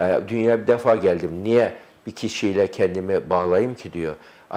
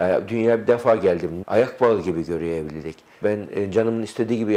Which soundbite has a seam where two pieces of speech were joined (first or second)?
second